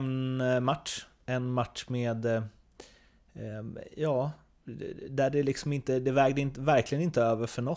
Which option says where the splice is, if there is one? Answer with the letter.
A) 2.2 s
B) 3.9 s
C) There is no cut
C